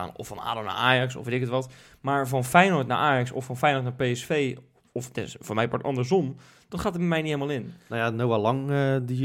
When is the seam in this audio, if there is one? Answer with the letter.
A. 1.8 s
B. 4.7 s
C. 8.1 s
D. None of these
D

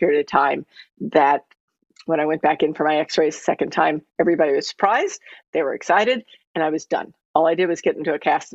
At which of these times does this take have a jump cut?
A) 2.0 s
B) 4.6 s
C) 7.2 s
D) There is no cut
B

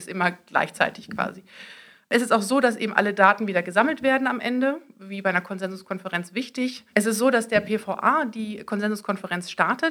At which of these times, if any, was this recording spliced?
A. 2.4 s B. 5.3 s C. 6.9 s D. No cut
C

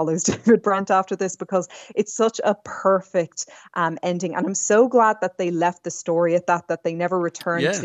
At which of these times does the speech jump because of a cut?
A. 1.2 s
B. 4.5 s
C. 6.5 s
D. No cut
D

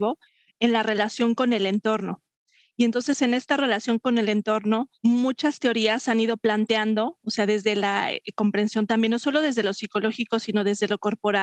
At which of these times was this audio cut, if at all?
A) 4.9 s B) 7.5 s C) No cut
A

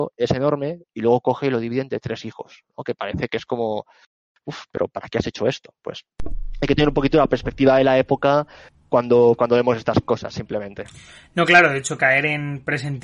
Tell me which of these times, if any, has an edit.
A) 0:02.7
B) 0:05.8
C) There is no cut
C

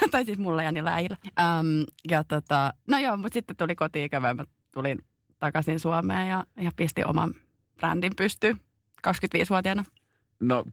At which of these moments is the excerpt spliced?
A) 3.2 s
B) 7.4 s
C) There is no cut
C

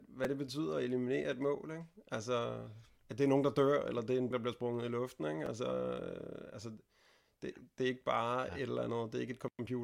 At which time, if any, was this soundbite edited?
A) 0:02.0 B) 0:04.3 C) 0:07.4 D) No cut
B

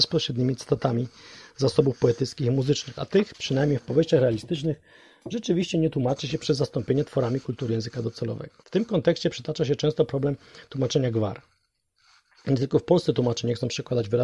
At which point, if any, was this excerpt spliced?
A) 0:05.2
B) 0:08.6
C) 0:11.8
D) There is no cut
B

